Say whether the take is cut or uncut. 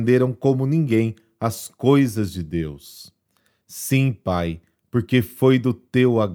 uncut